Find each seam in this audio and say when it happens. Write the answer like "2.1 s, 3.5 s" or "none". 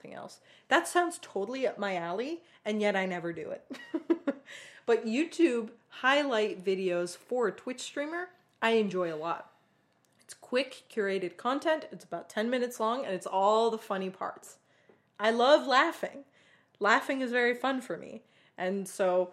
none